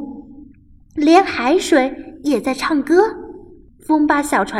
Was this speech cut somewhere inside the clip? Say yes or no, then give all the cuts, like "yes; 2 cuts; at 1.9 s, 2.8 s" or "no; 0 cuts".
yes; 1 cut; at 3.7 s